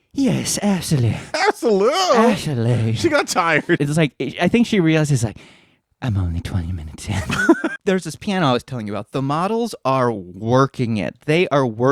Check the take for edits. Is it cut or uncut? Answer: cut